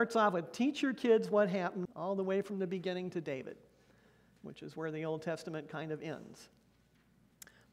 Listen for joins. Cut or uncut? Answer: cut